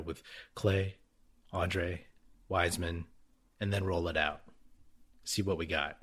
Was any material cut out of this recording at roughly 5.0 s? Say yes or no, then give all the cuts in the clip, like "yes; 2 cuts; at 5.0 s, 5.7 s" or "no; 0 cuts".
no; 1 cut; at 2.3 s